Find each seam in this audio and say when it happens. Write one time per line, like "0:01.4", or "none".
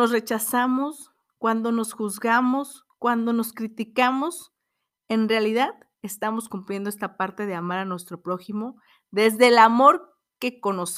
none